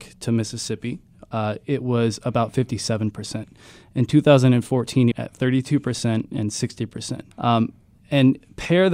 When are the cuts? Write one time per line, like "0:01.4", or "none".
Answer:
0:05.1
0:07.3